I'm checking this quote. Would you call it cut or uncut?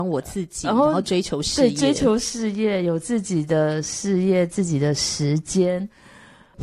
uncut